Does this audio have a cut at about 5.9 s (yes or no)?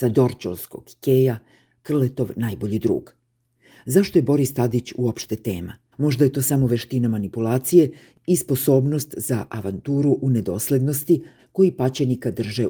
yes